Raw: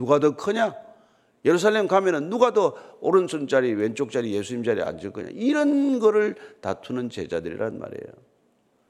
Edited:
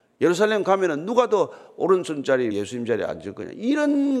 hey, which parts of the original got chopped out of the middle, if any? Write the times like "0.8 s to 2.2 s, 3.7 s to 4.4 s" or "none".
3.7 s to 4.3 s